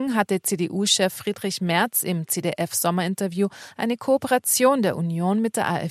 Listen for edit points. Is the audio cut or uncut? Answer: uncut